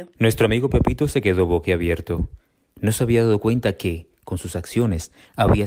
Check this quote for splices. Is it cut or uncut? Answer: uncut